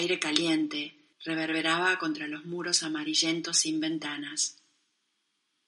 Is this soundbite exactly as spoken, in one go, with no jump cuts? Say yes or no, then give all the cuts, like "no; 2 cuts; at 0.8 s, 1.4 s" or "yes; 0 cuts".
no; 1 cut; at 1.1 s